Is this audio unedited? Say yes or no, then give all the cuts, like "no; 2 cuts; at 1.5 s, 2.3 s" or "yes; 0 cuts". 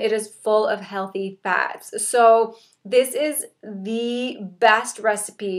yes; 0 cuts